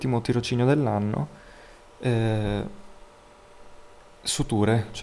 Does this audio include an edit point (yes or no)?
no